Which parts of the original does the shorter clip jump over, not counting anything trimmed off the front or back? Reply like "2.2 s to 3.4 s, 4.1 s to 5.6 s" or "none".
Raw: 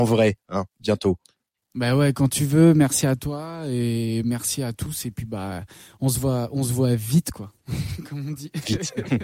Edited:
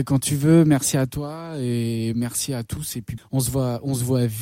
5.3 s to 5.9 s

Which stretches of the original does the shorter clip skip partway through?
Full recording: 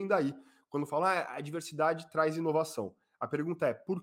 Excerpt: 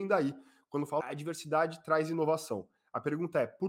1.0 s to 1.3 s

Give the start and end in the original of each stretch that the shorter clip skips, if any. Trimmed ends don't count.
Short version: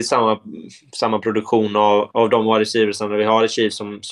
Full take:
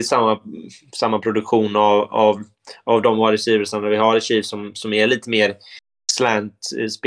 2.1 s to 2.8 s

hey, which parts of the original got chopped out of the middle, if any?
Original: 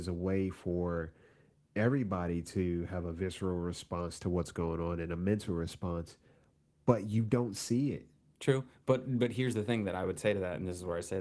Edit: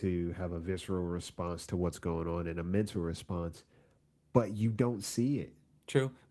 none

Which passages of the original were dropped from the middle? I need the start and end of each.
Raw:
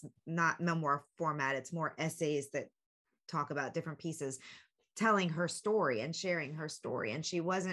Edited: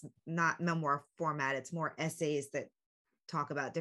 none

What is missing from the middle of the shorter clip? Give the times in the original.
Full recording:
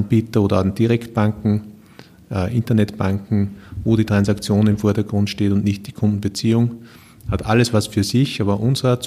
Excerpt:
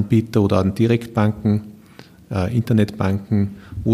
none

